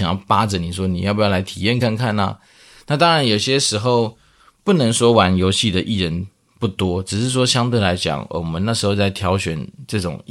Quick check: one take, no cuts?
yes; 0 cuts

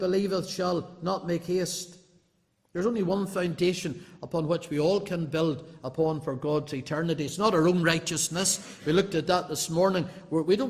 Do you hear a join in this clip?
no; 0 cuts

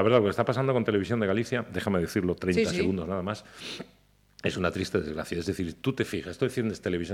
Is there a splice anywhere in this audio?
no; 0 cuts

